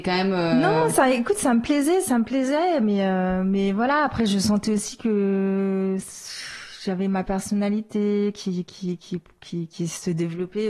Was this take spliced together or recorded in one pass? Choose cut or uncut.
uncut